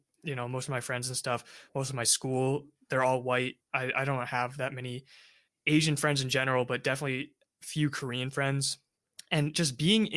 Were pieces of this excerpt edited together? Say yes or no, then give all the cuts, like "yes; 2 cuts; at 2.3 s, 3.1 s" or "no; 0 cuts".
no; 0 cuts